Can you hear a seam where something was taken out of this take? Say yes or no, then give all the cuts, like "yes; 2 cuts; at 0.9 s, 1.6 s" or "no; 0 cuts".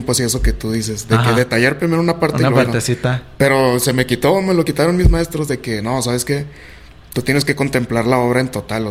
no; 0 cuts